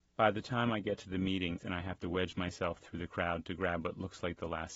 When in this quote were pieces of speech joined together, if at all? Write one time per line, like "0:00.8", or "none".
0:01.6